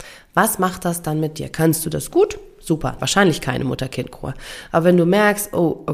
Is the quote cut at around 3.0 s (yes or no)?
yes